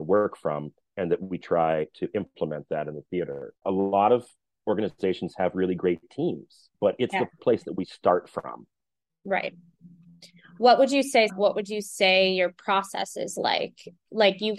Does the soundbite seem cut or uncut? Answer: cut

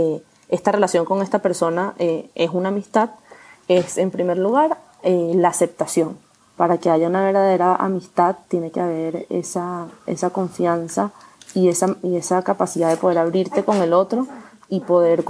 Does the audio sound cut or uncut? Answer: cut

